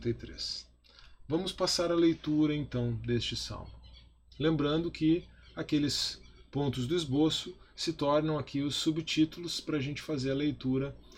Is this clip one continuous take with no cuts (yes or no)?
yes